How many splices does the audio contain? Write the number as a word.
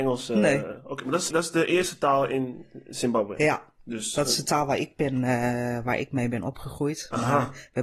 one